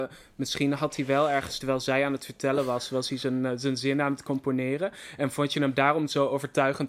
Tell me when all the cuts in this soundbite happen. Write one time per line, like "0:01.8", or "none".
none

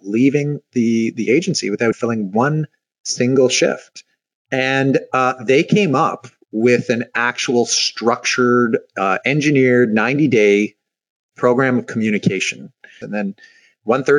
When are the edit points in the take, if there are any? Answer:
0:01.9
0:04.4
0:13.0

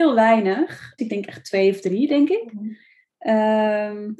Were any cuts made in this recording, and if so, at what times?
0:01.0

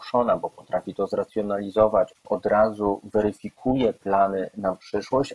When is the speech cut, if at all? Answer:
0:02.1

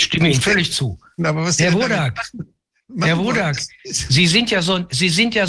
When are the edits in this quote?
0:01.2

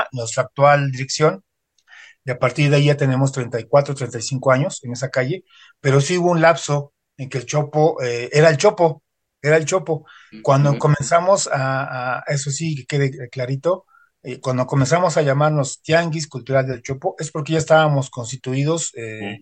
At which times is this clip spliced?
none

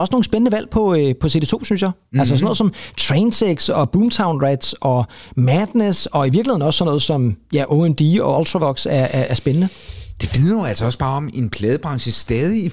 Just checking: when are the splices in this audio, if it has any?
none

